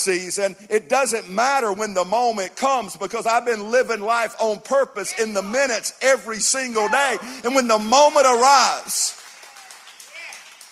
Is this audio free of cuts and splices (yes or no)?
yes